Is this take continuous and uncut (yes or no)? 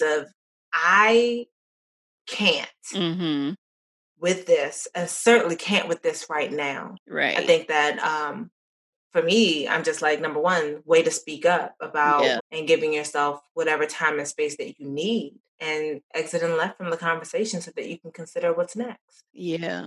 no